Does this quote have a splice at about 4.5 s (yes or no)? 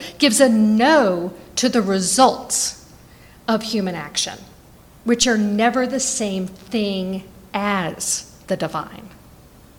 no